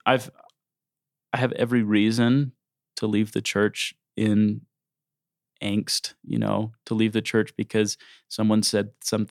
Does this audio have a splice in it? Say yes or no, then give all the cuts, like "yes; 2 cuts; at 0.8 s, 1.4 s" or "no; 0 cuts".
no; 0 cuts